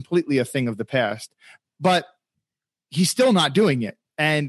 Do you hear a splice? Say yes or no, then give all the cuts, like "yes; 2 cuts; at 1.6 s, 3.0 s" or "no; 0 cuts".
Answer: yes; 1 cut; at 1.6 s